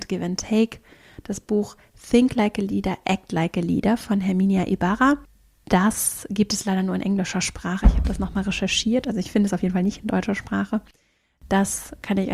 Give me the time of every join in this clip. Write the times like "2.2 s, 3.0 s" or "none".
none